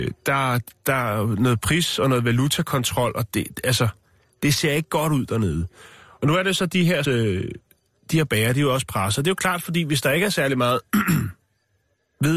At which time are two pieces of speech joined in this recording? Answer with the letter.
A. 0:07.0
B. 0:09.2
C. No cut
A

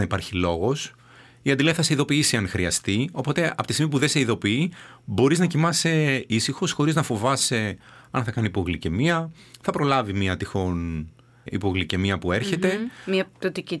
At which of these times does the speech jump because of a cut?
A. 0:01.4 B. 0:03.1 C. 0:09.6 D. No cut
D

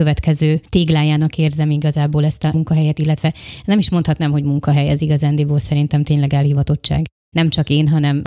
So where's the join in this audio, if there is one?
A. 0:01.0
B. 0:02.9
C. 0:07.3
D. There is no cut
C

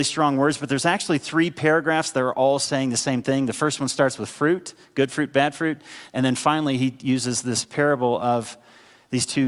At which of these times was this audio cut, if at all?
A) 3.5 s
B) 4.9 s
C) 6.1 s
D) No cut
C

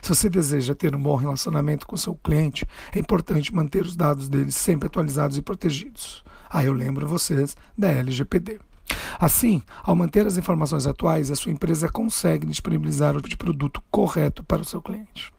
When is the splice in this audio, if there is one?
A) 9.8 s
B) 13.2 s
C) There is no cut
B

